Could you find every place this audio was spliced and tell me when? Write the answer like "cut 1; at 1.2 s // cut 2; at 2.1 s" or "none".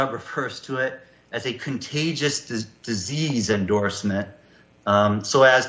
none